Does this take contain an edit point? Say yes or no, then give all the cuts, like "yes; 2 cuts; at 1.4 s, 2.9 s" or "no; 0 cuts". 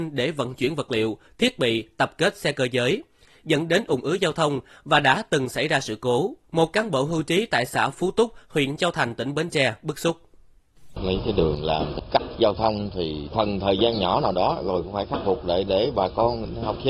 yes; 1 cut; at 6.4 s